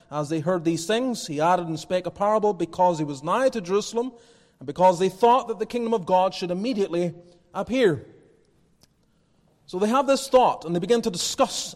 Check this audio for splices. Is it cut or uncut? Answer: uncut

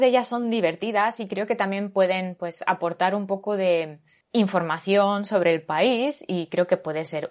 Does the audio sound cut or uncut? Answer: uncut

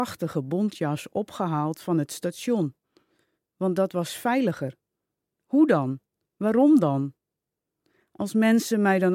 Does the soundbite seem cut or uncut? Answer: uncut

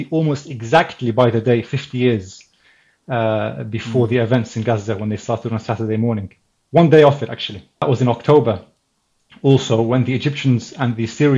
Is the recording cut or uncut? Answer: uncut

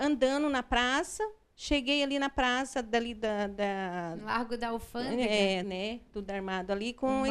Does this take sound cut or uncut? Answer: cut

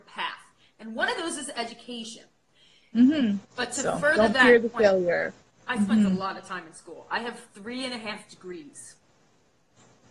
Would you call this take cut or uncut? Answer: cut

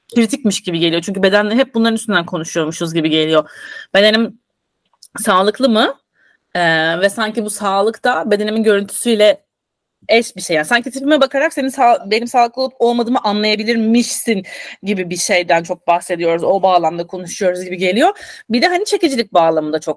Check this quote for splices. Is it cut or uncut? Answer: uncut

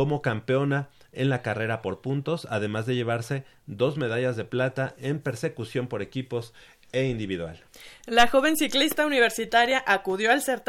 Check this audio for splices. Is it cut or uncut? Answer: uncut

